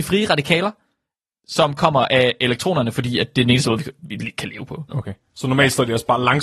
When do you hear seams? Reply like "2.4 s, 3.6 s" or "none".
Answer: 4.9 s